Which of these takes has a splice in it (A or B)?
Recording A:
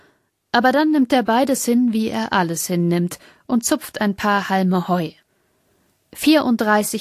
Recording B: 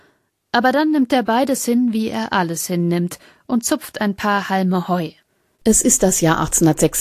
B